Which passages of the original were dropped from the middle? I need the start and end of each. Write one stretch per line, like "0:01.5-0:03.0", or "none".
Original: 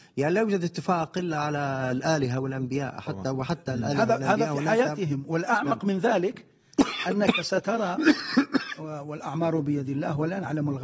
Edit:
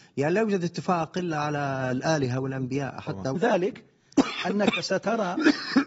0:03.4-0:06.0